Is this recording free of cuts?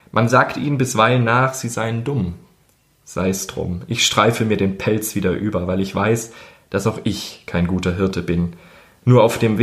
yes; 0 cuts

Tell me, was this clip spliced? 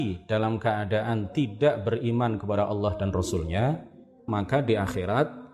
yes; 1 cut; at 4.3 s

